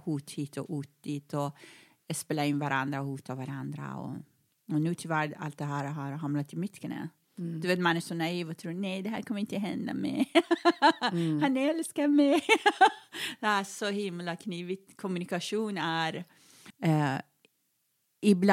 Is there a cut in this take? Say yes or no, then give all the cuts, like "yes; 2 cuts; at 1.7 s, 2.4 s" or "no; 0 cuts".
yes; 1 cut; at 16.7 s